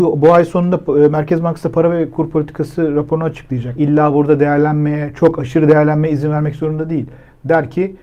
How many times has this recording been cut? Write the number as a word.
one